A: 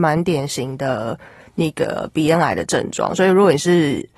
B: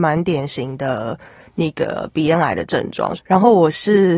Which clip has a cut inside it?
B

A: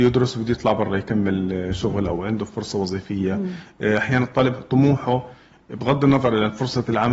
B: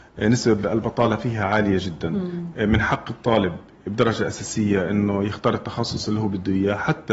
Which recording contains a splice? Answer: B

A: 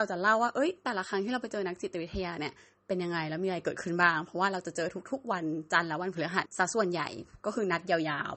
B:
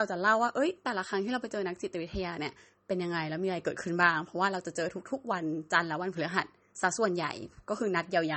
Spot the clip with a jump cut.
A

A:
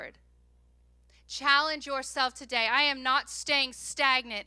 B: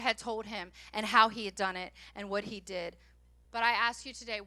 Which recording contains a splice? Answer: B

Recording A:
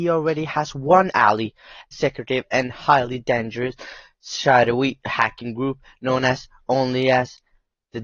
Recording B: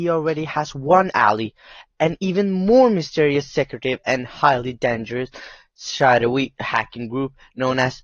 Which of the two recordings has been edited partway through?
A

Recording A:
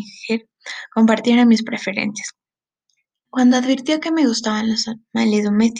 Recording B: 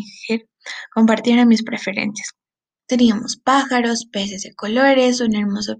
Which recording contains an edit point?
B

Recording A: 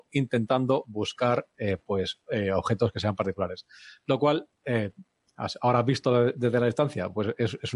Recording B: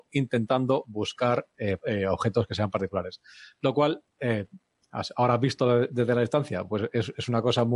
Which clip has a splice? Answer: B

